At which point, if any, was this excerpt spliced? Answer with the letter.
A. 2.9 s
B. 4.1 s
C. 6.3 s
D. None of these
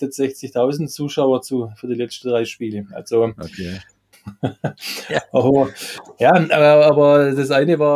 B